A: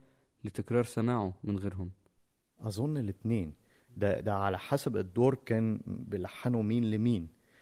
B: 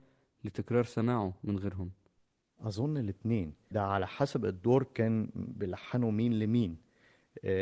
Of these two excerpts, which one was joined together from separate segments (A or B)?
B